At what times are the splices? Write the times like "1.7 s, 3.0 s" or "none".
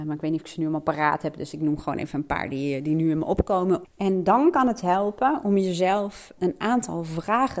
3.8 s, 6.4 s